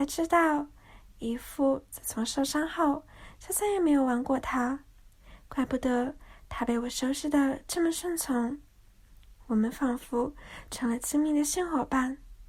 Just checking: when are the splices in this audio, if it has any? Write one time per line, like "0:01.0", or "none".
none